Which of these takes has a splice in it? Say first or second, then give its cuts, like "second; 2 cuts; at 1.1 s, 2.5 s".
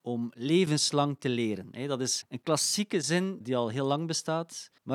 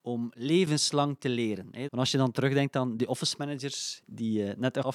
second; 1 cut; at 1.9 s